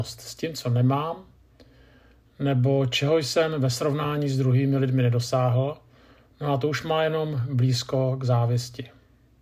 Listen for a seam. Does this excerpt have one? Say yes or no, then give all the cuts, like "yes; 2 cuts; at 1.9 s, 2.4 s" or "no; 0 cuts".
no; 0 cuts